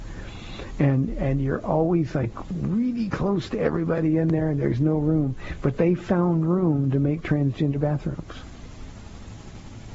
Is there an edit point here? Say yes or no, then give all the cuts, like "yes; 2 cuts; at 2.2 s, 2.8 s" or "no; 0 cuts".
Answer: no; 0 cuts